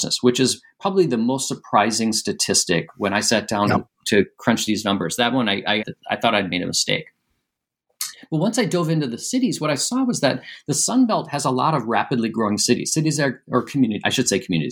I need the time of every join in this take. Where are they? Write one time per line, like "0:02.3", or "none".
0:05.8

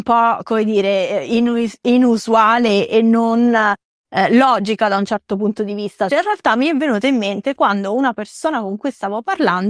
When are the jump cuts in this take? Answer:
0:06.1

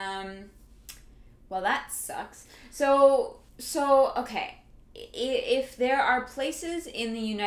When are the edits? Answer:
0:03.5

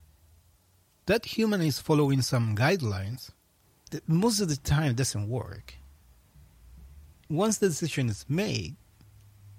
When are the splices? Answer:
0:03.9

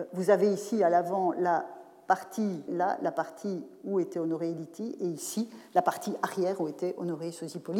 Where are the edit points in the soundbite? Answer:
0:02.7

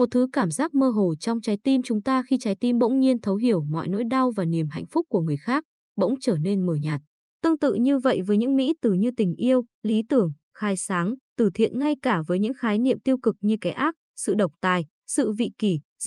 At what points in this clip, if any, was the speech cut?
0:07.2

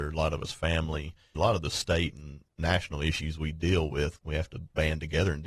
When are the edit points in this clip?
0:01.3
0:04.2

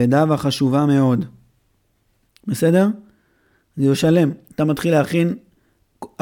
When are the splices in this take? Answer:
0:02.3

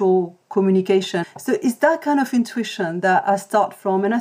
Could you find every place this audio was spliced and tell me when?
0:01.2

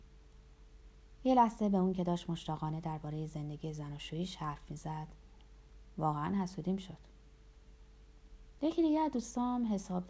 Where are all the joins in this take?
0:08.6

